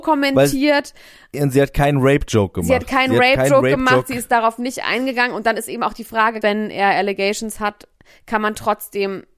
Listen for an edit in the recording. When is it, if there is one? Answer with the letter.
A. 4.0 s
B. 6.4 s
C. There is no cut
B